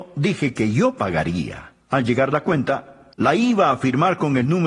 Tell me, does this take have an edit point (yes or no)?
yes